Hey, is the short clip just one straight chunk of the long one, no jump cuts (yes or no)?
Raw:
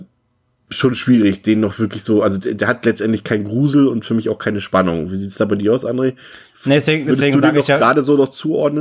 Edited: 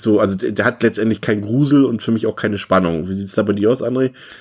yes